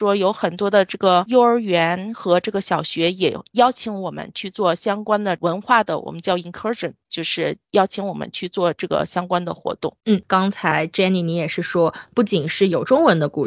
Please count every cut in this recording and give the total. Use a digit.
0